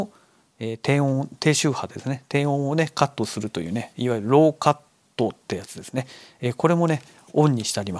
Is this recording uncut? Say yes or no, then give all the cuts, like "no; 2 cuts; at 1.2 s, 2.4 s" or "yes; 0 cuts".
yes; 0 cuts